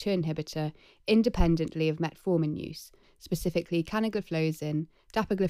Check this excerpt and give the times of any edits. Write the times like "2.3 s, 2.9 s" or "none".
3.0 s